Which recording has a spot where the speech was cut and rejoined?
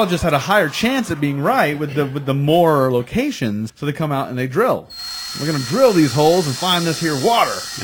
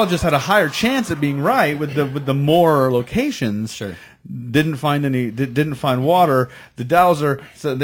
first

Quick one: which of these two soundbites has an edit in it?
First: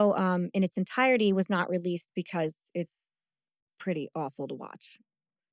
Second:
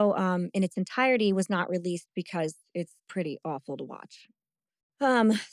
second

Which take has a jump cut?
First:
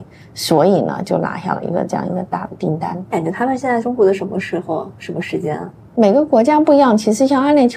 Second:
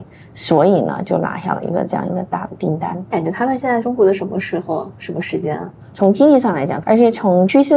second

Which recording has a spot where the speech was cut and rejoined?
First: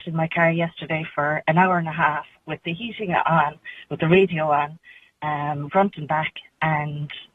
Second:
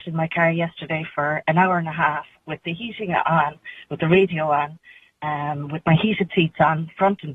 first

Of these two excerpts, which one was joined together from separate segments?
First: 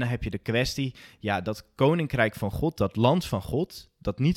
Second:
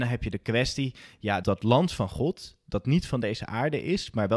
second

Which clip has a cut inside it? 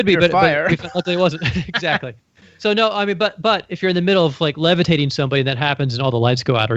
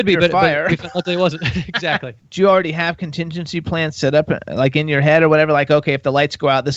second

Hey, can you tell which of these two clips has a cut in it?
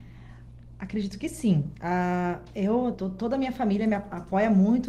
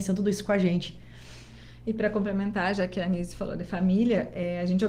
first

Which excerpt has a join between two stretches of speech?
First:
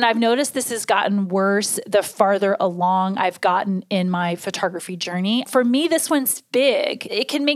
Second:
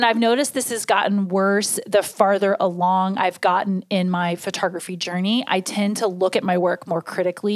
first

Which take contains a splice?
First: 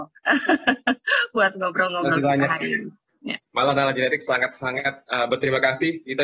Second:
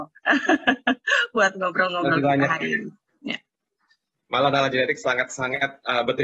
first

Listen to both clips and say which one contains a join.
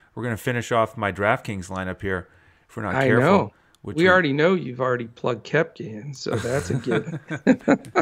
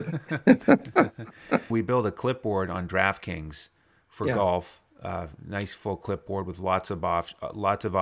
second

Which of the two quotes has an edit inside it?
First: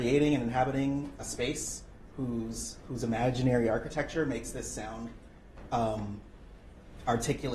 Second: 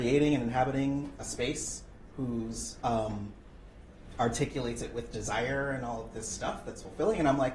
second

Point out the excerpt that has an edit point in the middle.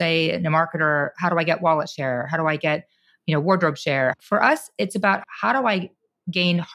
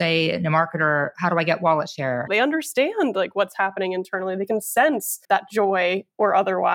second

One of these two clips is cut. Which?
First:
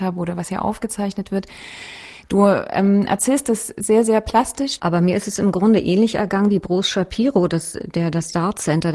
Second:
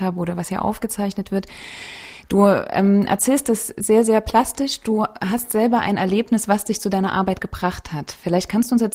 first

